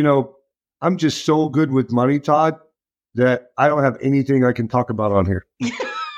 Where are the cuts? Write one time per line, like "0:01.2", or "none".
none